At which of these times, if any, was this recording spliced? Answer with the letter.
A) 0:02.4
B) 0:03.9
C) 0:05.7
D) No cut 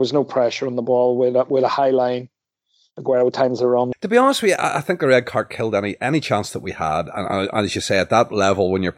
B